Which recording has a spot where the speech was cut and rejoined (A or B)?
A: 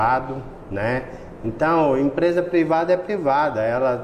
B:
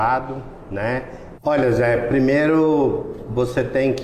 B